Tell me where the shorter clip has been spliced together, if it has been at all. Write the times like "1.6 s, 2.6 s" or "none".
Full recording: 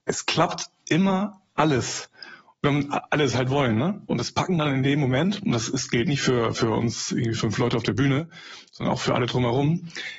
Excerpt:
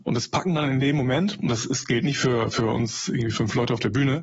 none